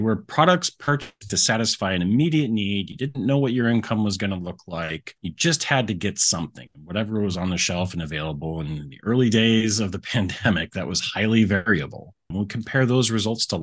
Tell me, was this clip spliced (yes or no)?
yes